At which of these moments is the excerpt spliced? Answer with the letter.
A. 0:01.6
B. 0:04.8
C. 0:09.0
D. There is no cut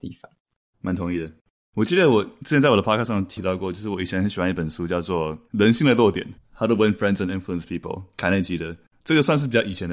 D